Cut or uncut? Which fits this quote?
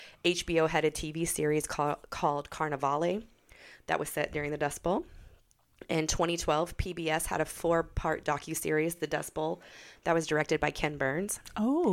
uncut